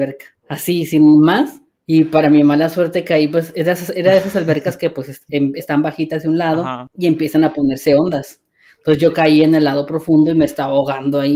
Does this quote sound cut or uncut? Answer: uncut